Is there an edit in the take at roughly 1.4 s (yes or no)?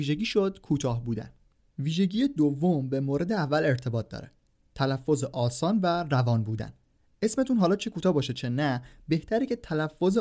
no